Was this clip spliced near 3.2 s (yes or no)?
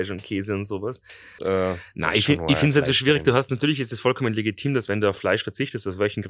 no